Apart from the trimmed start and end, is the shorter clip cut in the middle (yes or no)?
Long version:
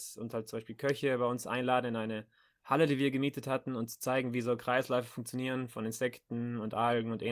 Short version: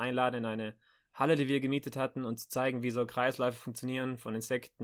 no